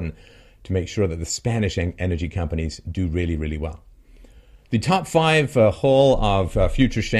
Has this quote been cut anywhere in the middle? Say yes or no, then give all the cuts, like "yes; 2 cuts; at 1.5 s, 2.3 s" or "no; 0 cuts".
no; 0 cuts